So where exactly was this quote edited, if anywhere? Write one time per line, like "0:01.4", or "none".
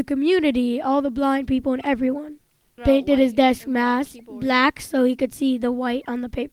0:02.8